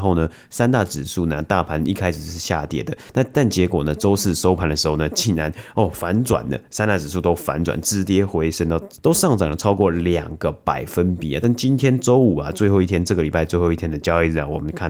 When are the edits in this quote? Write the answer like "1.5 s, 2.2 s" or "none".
none